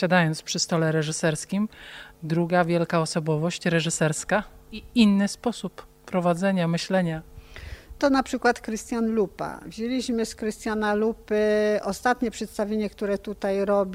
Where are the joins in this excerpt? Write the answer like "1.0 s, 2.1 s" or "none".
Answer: none